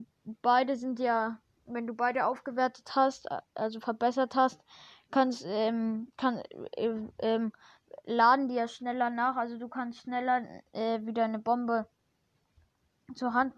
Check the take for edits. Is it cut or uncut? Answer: uncut